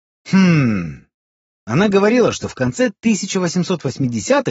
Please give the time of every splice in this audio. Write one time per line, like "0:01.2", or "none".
0:01.6